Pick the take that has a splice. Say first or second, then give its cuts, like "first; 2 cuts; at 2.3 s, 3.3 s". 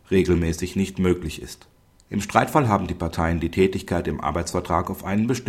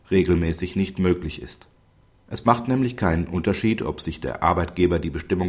first; 1 cut; at 1.9 s